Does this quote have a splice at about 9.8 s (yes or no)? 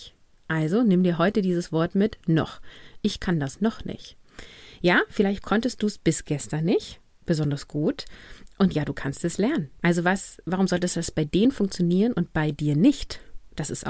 yes